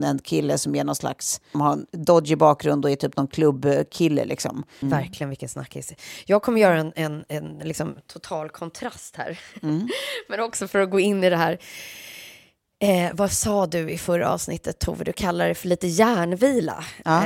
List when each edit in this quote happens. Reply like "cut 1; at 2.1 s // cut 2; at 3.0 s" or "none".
cut 1; at 1.5 s // cut 2; at 4.8 s